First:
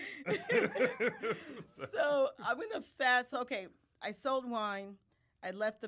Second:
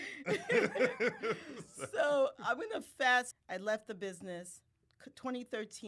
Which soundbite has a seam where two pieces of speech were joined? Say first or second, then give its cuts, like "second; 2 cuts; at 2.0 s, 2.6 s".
second; 1 cut; at 3.3 s